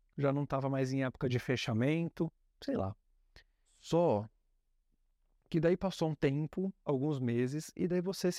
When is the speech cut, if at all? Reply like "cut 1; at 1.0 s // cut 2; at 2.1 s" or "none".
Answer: cut 1; at 3.7 s // cut 2; at 6.9 s

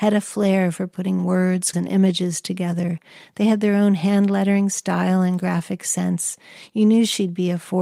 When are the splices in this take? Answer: cut 1; at 1.7 s

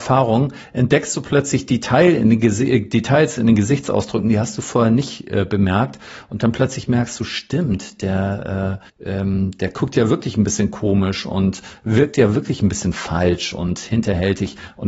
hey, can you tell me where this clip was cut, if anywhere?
cut 1; at 8.9 s

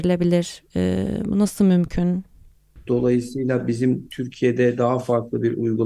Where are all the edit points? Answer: cut 1; at 2.8 s

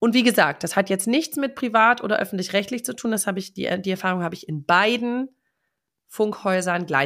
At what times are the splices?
none

